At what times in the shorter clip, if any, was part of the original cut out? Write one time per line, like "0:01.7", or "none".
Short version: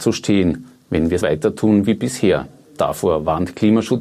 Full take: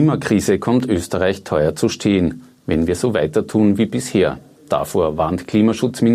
0:01.2